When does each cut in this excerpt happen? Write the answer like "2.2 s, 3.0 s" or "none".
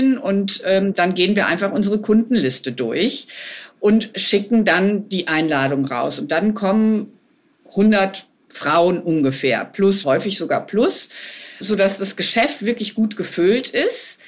10.0 s, 11.6 s